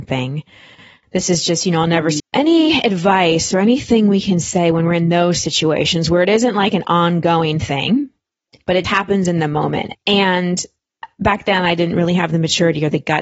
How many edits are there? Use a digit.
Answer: 3